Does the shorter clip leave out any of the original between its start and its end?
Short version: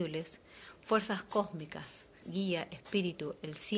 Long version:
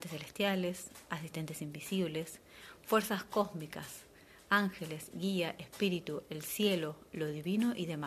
yes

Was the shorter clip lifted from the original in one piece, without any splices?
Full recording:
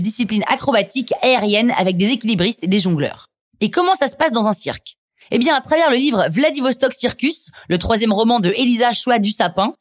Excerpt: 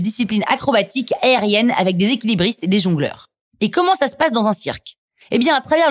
yes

